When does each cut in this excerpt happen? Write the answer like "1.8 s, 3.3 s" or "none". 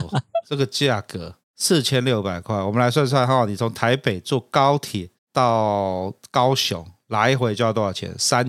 none